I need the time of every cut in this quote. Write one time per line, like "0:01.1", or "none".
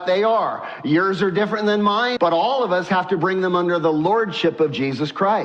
0:02.2